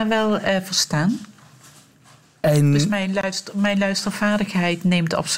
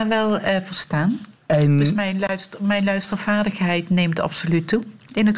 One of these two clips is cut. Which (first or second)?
second